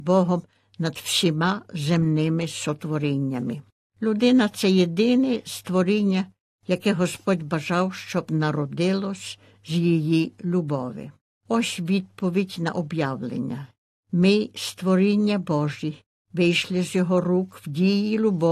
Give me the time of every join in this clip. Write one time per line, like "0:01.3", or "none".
none